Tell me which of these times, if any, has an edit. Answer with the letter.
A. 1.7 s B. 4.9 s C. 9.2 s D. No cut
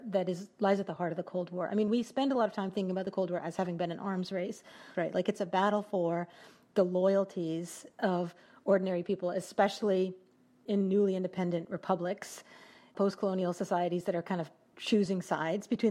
B